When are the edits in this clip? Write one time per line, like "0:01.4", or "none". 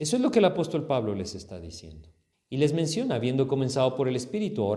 0:02.3